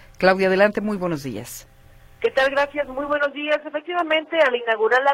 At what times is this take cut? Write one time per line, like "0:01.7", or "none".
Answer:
none